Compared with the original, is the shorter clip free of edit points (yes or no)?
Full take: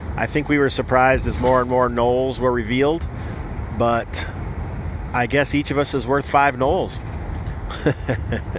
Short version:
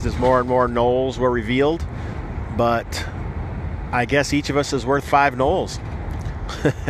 yes